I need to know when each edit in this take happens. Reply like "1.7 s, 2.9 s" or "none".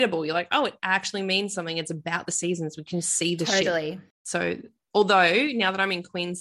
4.1 s